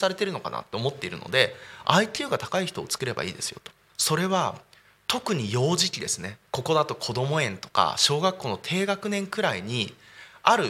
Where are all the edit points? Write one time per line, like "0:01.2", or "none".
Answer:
0:03.9
0:06.5